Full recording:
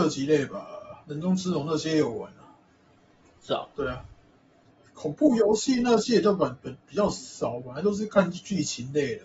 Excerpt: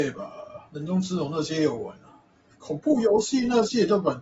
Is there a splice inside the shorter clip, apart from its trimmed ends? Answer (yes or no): yes